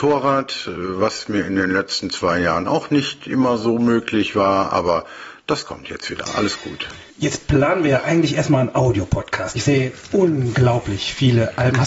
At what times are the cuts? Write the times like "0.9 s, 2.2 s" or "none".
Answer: 7.1 s, 9.6 s